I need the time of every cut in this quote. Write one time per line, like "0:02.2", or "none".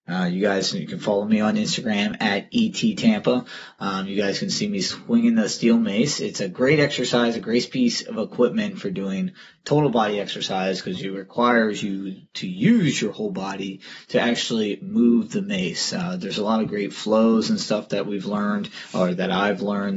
none